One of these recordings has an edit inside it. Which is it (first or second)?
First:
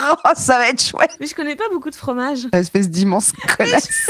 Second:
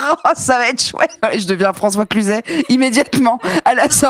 first